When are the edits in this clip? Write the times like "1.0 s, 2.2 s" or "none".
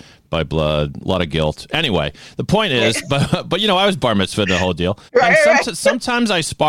5.1 s

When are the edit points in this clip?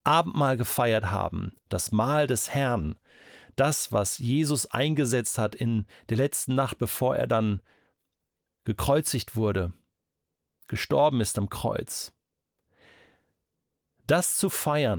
none

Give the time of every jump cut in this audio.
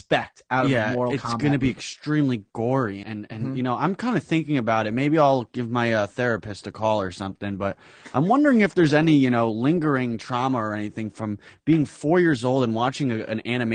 3.0 s

